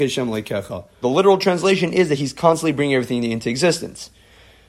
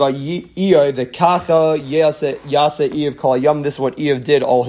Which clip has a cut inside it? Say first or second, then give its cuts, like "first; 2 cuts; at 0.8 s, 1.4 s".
first; 1 cut; at 1.0 s